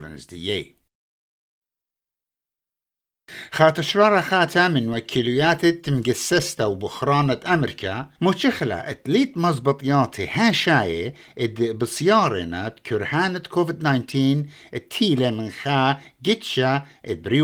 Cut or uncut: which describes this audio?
cut